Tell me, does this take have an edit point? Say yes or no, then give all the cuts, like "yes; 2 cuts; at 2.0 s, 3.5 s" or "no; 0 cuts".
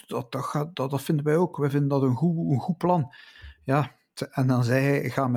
no; 0 cuts